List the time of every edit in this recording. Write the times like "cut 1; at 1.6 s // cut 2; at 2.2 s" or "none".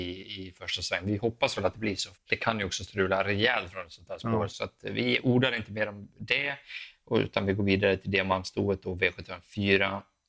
cut 1; at 2.1 s // cut 2; at 4.5 s